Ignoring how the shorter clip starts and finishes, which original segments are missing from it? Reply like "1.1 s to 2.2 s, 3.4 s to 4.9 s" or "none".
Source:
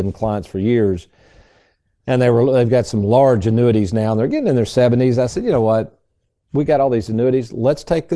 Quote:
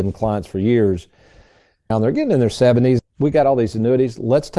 1.9 s to 4.1 s, 5.1 s to 6.3 s

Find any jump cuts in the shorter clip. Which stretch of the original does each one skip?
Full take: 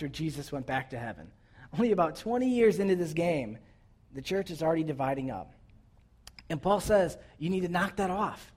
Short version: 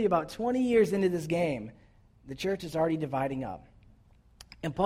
none

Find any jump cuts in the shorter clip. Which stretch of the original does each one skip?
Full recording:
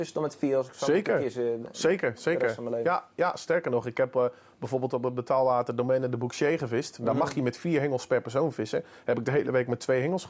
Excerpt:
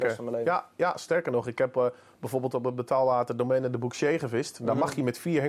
none

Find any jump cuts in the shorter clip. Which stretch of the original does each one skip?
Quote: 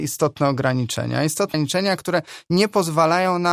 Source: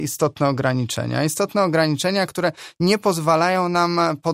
1.5 s to 1.8 s

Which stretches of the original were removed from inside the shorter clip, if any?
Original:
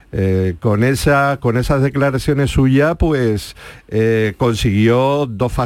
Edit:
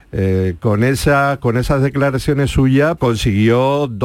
3.0 s to 4.4 s

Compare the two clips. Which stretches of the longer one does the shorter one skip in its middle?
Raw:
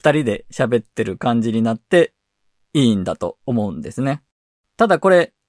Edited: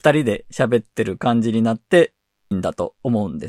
2.5 s to 2.9 s

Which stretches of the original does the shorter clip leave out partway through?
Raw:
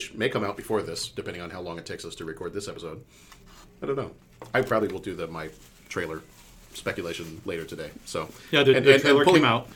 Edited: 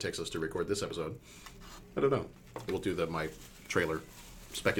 4.5 s to 4.9 s

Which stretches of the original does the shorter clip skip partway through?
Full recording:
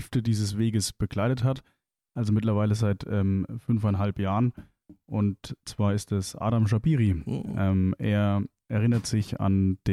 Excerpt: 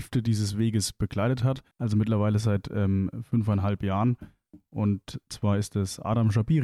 1.7 s to 2.1 s

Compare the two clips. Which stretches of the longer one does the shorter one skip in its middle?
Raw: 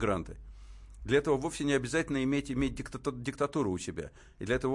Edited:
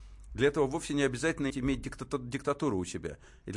2.2 s to 2.4 s

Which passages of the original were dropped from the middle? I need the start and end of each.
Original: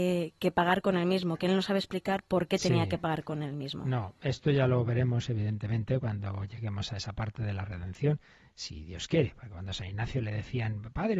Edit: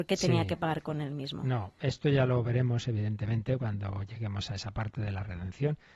none

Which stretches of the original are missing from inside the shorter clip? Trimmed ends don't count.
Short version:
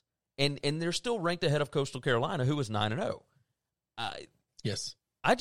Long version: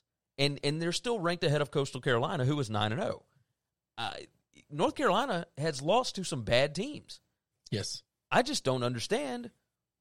4.5 s to 7.5 s

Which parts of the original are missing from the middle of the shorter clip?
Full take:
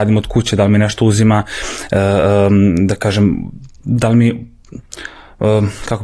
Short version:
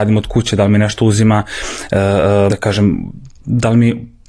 2.5 s to 2.9 s

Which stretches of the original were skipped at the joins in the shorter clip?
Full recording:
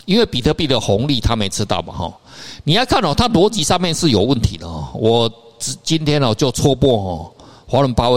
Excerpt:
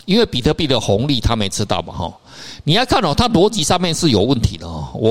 none

